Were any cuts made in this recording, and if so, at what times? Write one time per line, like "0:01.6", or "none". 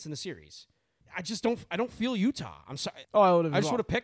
0:01.0
0:03.0